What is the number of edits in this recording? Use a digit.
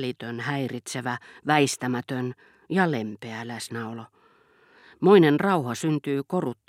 0